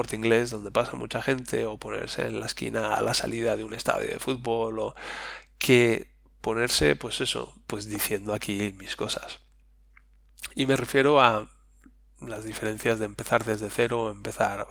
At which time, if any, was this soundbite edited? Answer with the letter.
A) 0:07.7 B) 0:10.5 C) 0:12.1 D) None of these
A